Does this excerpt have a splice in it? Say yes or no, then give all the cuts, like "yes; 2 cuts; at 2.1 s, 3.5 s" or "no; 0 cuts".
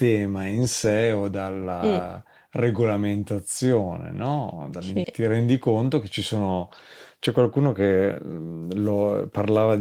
yes; 1 cut; at 5.0 s